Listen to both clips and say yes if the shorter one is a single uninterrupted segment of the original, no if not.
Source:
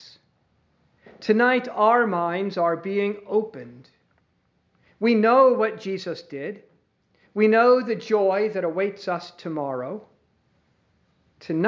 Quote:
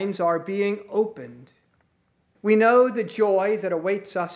no